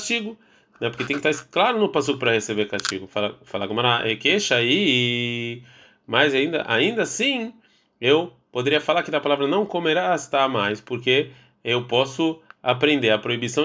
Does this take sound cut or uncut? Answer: uncut